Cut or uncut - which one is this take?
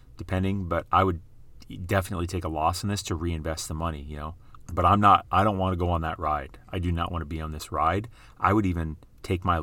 cut